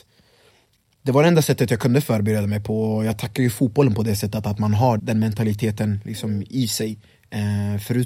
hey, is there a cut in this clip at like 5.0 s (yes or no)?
yes